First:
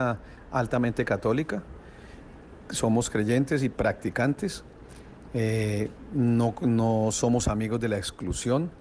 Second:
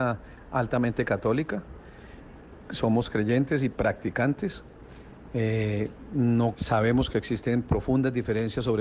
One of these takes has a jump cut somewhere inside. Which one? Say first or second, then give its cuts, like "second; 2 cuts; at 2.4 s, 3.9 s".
second; 1 cut; at 6.5 s